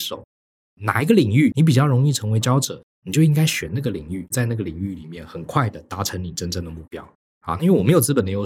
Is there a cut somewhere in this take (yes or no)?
yes